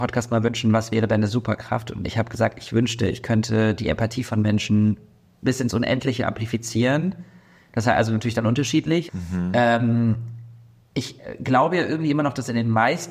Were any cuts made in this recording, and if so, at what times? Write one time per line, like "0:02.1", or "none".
0:09.1

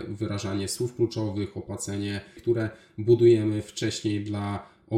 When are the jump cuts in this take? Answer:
0:02.4

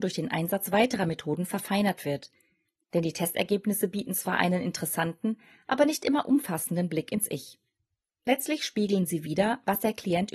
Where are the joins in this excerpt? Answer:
none

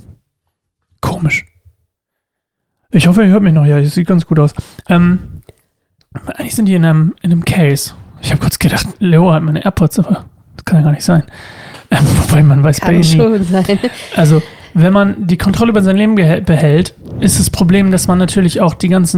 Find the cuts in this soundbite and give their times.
none

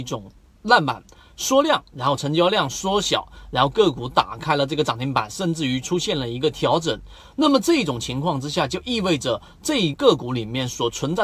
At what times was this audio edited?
0:09.9

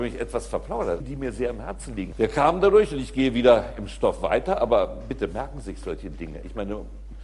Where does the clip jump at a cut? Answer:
0:01.0
0:02.1

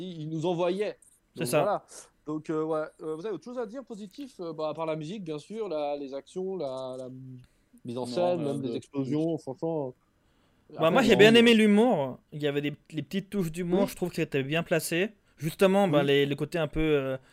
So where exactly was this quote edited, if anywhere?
none

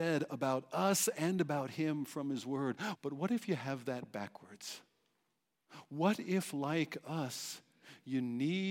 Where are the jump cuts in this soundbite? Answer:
0:02.9

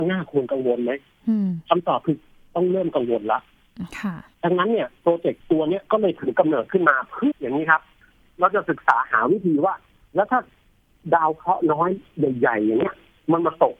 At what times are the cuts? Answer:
0:07.3

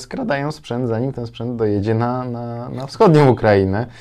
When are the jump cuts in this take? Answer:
none

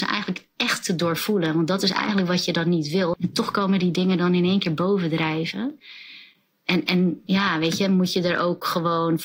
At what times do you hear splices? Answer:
0:03.1

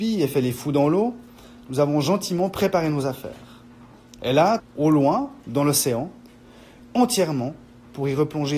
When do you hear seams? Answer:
0:04.6
0:06.8

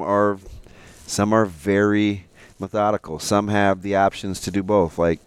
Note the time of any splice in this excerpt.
none

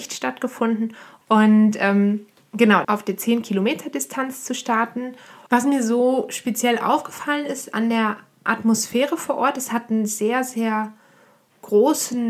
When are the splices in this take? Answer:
0:01.2
0:02.8
0:05.5

